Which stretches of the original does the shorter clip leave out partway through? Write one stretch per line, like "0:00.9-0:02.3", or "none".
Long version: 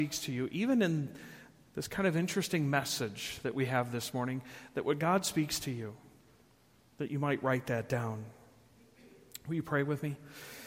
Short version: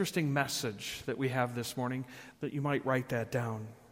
0:04.7-0:06.9